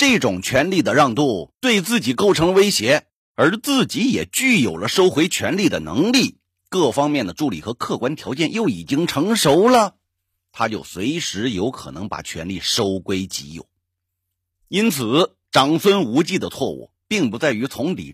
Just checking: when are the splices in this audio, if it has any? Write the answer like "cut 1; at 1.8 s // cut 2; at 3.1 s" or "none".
none